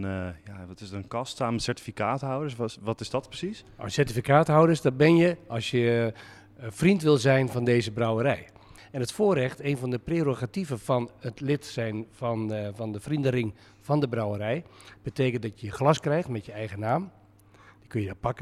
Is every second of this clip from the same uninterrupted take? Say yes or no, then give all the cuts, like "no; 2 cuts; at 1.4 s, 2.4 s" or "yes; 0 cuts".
yes; 0 cuts